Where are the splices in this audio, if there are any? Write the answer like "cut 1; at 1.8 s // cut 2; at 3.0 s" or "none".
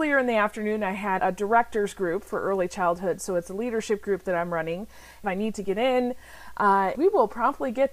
cut 1; at 1.2 s // cut 2; at 5.2 s // cut 3; at 6.9 s

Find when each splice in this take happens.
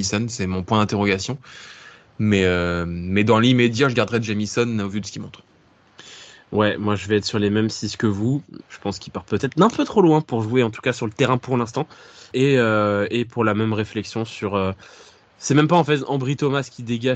cut 1; at 8.6 s

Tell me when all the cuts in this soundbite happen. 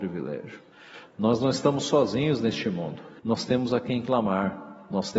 cut 1; at 3.2 s

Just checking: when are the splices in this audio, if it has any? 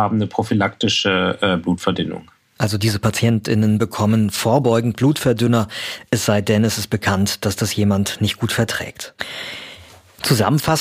none

